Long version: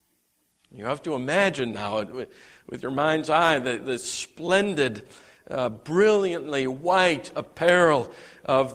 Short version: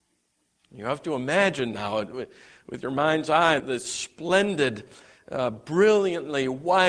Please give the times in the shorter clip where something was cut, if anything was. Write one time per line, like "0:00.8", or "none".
0:03.6